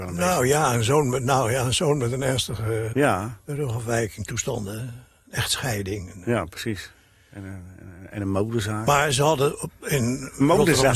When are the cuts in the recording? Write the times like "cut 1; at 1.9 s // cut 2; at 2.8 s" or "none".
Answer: cut 1; at 2.9 s